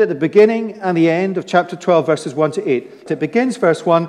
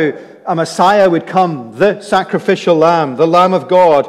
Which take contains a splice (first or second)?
first